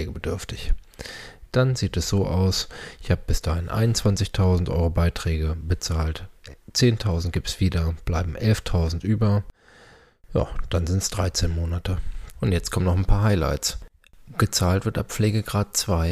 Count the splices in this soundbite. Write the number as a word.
one